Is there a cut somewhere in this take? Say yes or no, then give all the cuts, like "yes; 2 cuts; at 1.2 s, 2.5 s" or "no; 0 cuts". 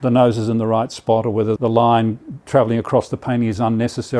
yes; 1 cut; at 1.6 s